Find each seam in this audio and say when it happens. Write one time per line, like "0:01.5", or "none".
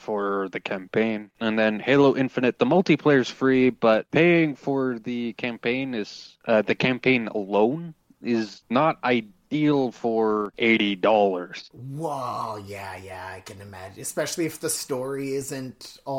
none